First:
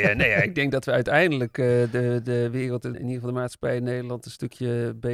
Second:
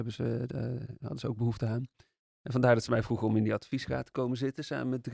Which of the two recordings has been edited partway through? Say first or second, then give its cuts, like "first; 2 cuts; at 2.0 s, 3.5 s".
first; 1 cut; at 2.9 s